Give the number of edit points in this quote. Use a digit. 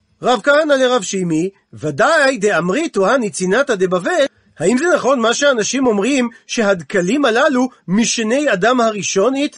0